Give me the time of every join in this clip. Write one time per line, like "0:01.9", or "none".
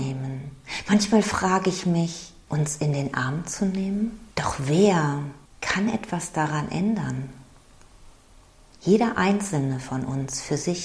0:02.5
0:04.3